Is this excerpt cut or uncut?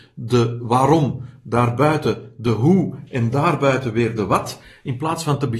uncut